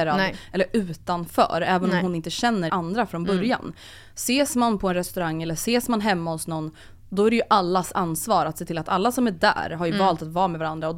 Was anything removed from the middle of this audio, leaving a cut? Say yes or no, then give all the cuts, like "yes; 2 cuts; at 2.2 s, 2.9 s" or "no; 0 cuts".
yes; 1 cut; at 2.7 s